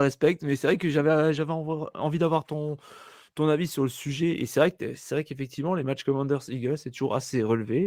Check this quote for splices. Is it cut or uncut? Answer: uncut